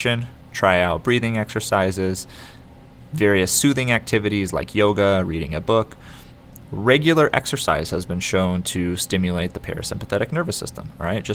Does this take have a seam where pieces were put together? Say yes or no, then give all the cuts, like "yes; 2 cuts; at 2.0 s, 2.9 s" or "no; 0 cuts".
no; 0 cuts